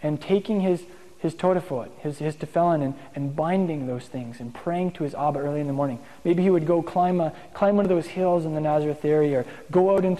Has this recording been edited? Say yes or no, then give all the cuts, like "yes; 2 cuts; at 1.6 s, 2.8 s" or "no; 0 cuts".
no; 0 cuts